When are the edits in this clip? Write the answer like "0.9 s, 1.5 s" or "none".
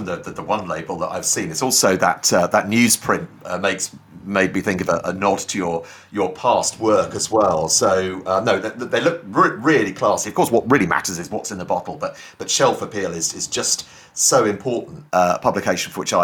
15.1 s